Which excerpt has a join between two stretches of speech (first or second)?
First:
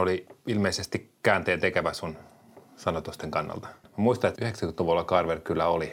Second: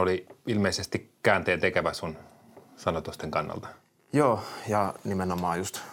first